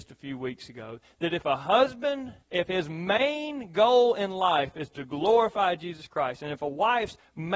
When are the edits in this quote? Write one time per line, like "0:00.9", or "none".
0:02.4